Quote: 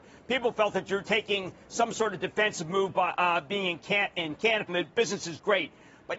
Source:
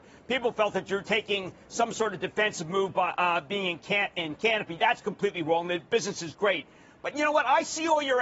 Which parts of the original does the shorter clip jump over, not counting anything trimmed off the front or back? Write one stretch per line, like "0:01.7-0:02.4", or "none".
0:04.7-0:05.6